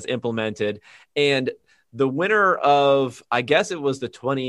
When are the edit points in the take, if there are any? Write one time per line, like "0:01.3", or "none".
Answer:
none